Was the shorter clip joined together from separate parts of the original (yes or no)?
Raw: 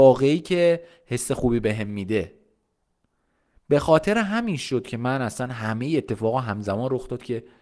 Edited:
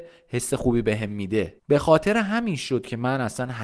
yes